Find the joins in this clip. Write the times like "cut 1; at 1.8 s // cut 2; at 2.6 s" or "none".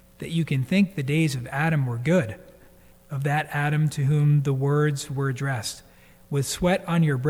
cut 1; at 2.9 s